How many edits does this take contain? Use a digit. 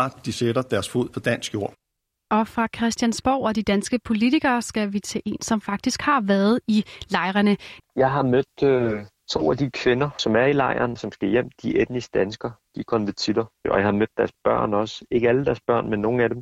2